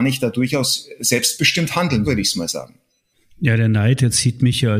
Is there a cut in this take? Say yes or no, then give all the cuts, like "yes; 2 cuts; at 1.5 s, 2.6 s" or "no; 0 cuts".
yes; 1 cut; at 2.0 s